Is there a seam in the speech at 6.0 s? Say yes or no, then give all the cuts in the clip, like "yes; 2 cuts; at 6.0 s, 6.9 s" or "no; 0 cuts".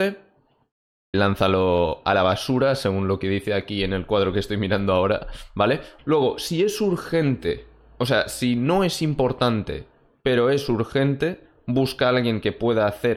yes; 2 cuts; at 1.1 s, 6.0 s